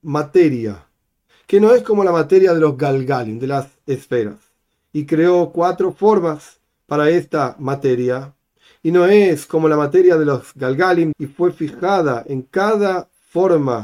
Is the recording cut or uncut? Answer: cut